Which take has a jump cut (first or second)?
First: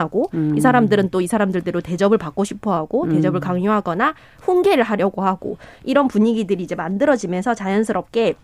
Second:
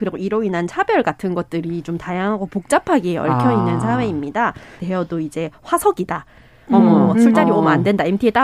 second